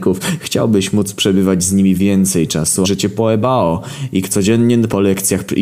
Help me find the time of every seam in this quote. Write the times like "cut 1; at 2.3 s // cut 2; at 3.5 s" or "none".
cut 1; at 2.8 s